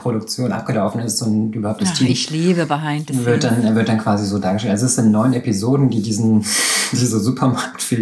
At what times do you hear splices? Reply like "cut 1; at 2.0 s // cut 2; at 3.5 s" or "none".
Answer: none